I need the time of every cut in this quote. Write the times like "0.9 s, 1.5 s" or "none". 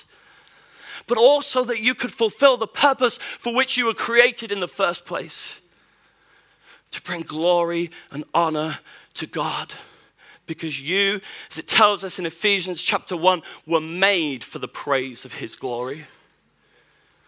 none